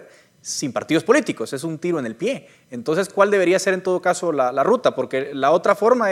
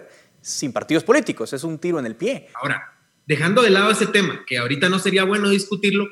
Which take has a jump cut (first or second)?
second